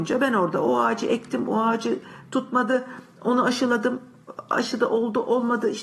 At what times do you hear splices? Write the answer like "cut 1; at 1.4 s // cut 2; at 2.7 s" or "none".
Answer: none